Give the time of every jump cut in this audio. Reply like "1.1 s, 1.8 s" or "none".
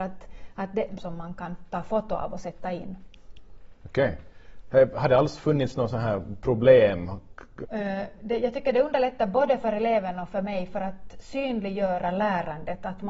1.0 s, 7.6 s